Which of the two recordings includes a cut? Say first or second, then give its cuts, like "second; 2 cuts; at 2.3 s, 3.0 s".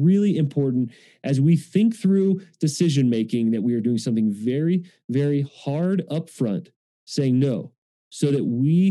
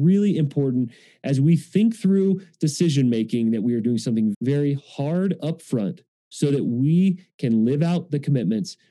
second; 2 cuts; at 4.3 s, 6.2 s